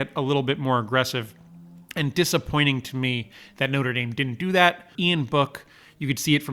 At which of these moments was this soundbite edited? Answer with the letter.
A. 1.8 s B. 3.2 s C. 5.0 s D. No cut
C